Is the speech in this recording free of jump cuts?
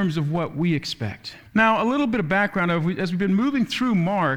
no; 1 cut; at 1.5 s

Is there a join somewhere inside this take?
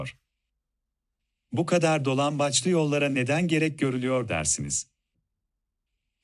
no; 0 cuts

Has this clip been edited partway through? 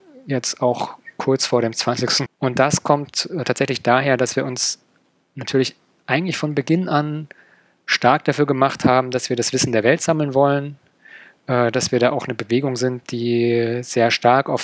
yes; 1 cut; at 2.3 s

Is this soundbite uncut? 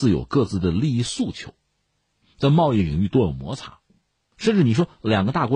no; 2 cuts; at 2.2 s, 4.3 s

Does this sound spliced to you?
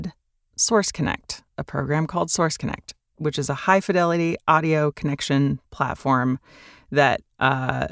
no; 0 cuts

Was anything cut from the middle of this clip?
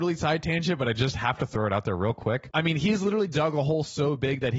yes; 1 cut; at 2.5 s

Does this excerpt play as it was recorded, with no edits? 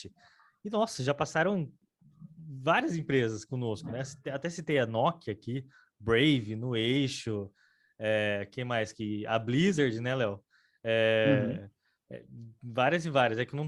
yes; 0 cuts

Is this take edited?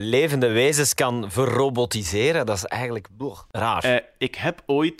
no; 0 cuts

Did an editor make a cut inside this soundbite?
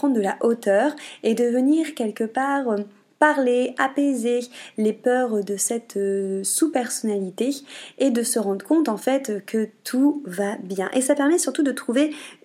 no; 0 cuts

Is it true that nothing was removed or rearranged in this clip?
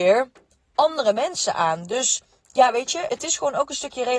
no; 1 cut; at 3.1 s

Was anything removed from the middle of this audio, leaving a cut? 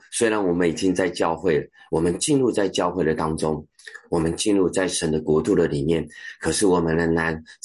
no; 0 cuts

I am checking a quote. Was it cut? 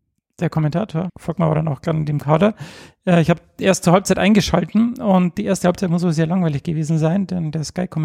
yes; 1 cut; at 1.1 s

